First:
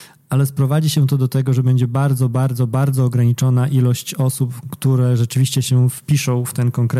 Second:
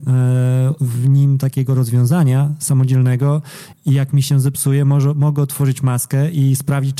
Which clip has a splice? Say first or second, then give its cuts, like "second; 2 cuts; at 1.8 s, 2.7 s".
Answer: second; 1 cut; at 3.7 s